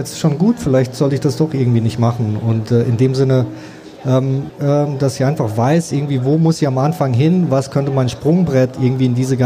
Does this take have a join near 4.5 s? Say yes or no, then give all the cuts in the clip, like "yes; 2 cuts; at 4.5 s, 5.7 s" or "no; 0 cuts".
yes; 1 cut; at 4.5 s